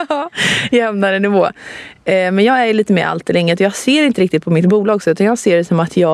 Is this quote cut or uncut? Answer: uncut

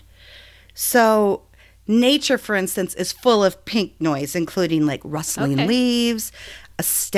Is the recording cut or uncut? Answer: uncut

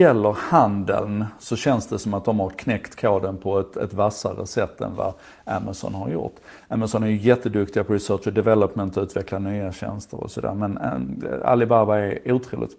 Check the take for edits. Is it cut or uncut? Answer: uncut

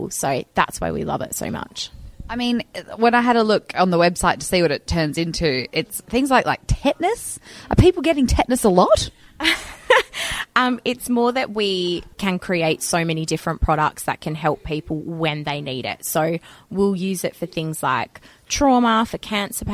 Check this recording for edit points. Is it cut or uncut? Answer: cut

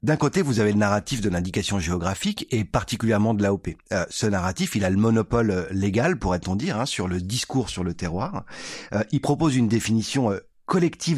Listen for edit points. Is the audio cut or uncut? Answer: uncut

